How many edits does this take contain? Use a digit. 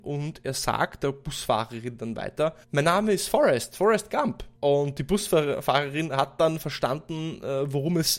2